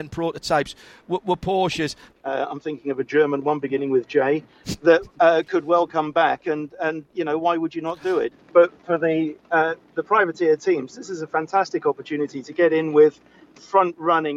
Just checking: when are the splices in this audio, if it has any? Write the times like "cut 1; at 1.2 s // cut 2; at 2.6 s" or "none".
cut 1; at 2.1 s // cut 2; at 8.3 s